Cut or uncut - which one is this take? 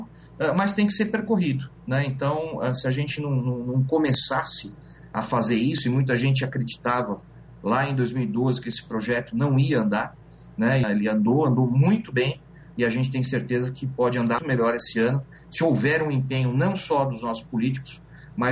cut